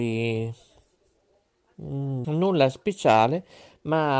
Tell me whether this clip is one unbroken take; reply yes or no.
no